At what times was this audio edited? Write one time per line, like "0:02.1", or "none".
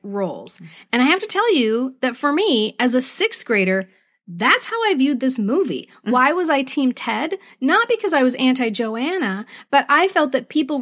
none